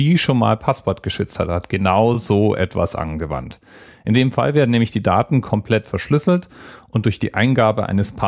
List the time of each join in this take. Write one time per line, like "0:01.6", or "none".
none